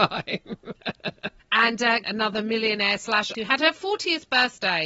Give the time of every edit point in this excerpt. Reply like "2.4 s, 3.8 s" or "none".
2.0 s, 3.3 s